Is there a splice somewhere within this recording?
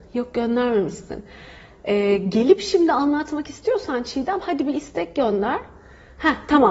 no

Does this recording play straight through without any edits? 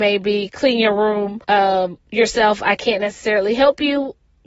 no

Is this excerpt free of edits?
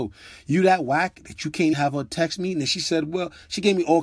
no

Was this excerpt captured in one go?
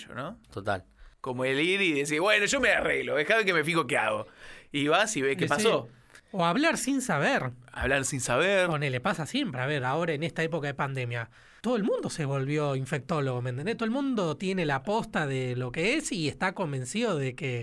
yes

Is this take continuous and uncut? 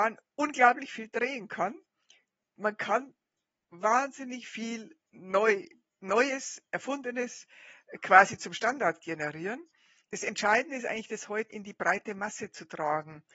no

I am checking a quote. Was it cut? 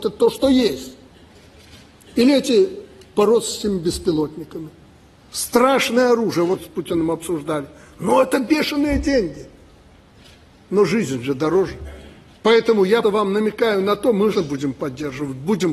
yes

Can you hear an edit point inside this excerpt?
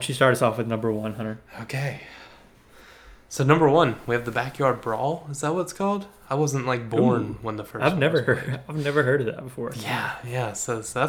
no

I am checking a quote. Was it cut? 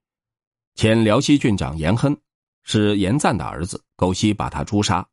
yes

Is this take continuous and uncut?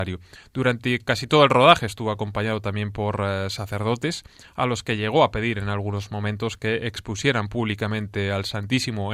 yes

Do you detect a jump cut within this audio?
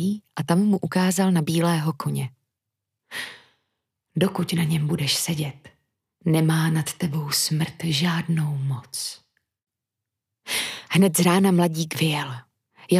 no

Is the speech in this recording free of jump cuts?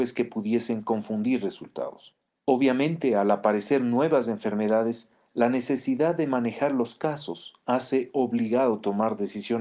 yes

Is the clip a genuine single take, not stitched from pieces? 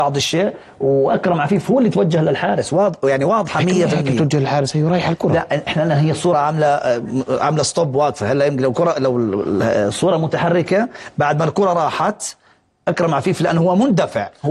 yes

